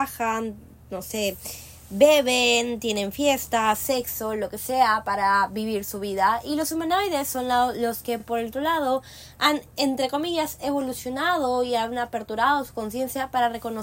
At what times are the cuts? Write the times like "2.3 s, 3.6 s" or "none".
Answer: none